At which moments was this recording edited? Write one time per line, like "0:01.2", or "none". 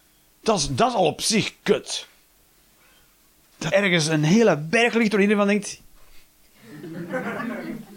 0:03.7